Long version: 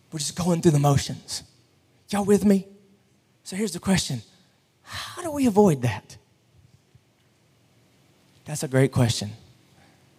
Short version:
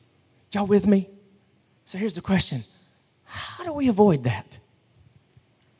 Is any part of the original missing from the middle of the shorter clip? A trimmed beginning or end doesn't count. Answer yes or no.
no